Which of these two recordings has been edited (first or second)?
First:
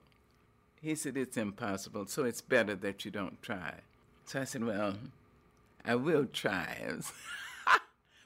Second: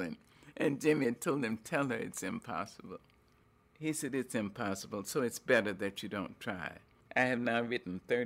second